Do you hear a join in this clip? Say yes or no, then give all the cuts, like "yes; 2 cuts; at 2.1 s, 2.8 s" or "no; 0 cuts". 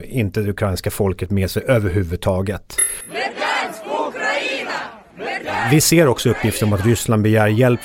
no; 0 cuts